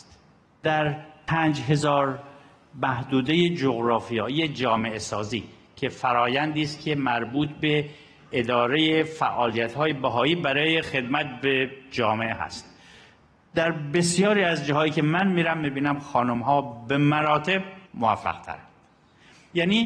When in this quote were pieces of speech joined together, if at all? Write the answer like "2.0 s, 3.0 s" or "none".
17.9 s